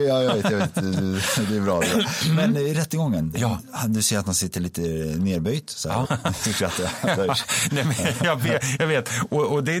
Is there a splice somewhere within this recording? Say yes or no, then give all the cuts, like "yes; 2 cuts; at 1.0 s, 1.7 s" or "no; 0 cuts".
yes; 2 cuts; at 3.3 s, 6.0 s